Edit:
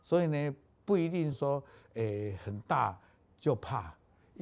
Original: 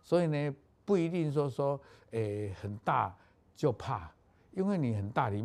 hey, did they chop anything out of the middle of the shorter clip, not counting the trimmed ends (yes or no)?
yes